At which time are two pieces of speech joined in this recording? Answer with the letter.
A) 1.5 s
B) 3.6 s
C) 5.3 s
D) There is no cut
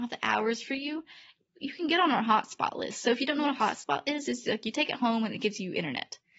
D